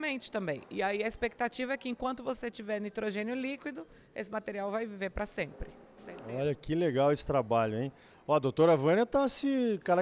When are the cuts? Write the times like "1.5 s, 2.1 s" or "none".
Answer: none